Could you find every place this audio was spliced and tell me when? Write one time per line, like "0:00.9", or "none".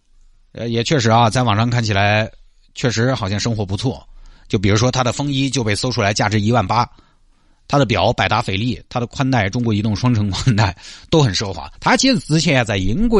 0:11.8